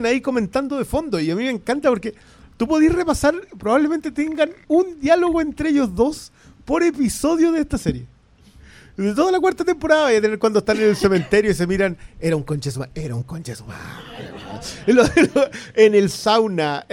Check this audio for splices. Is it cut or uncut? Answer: uncut